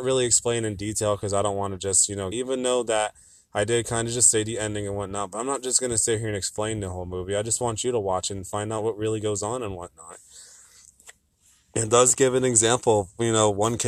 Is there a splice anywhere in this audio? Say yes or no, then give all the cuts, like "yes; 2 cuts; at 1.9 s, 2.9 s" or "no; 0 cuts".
yes; 1 cut; at 2.3 s